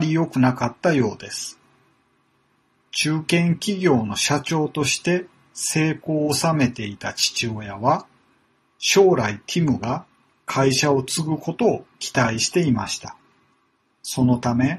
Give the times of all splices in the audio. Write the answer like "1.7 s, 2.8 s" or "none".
13.8 s